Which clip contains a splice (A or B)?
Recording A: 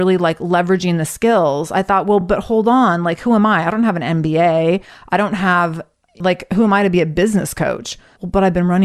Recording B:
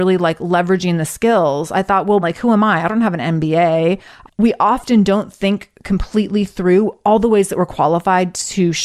B